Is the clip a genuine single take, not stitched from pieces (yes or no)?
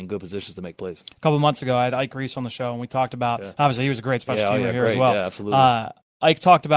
yes